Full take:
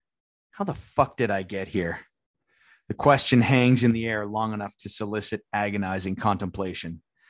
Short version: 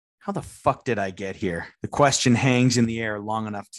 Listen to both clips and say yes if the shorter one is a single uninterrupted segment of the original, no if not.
no